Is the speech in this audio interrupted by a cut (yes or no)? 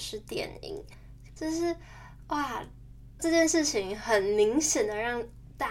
yes